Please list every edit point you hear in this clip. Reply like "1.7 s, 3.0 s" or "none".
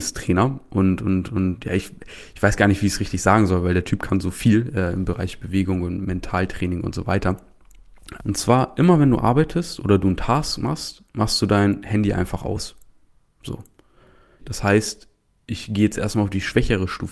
8.2 s, 14.4 s